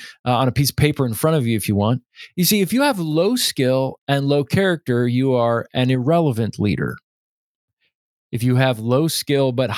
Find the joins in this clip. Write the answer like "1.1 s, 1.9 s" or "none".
none